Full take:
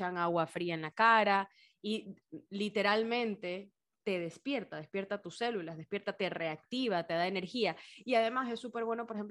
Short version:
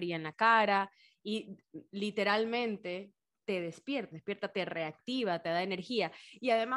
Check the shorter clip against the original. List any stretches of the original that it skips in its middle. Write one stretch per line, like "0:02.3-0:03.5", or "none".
0:04.7-0:05.8